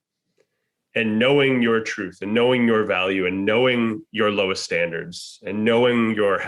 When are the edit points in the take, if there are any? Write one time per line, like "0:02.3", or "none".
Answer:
none